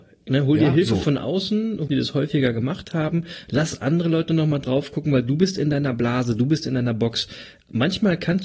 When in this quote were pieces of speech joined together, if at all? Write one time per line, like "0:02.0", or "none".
0:01.9